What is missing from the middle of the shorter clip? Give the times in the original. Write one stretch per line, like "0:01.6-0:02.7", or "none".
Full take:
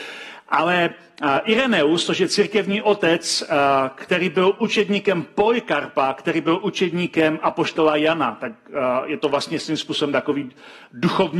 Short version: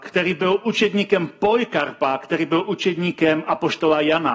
none